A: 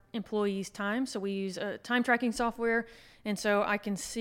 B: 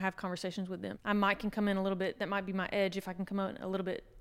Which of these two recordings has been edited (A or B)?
B